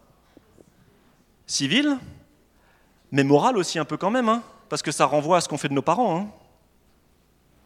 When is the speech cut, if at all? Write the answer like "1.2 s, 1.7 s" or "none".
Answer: none